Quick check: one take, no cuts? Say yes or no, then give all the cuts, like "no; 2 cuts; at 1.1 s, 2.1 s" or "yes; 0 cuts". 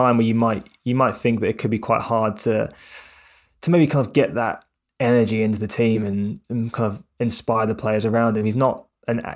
yes; 0 cuts